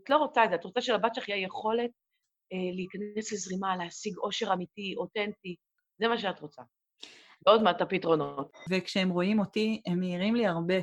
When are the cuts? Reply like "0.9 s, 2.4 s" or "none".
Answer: 7.4 s, 8.7 s